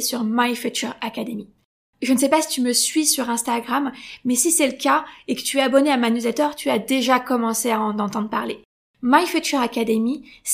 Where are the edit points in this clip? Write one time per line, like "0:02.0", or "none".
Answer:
none